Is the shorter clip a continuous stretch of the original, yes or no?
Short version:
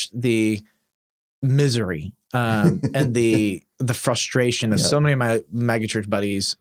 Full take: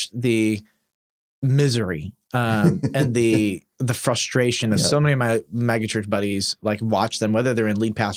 yes